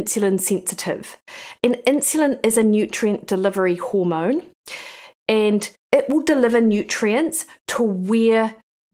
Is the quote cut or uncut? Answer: cut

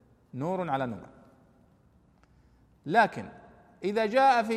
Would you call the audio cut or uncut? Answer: uncut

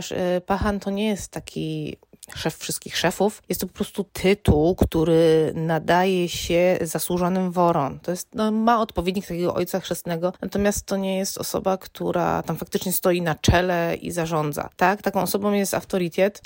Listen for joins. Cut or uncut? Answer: uncut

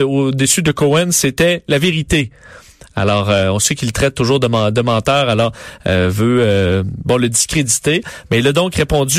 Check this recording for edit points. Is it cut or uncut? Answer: uncut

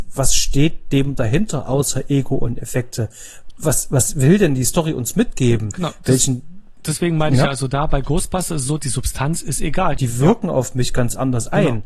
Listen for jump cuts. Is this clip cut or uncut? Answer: cut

